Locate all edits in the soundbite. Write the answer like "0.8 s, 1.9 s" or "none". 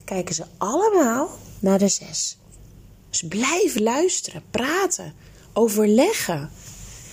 3.1 s

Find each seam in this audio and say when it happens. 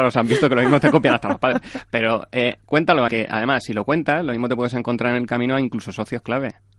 3.1 s

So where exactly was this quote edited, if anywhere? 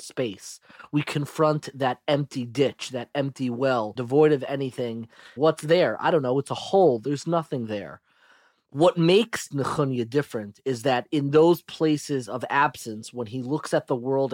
4.0 s, 5.4 s

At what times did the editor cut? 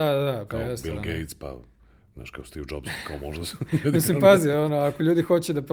none

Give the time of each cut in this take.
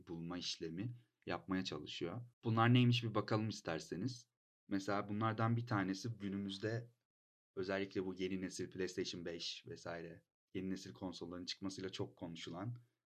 2.3 s

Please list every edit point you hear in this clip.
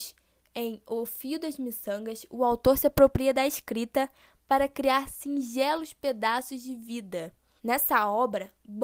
7.6 s

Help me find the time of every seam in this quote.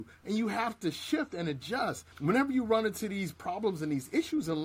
2.1 s

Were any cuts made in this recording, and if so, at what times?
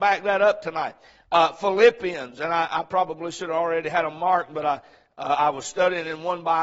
none

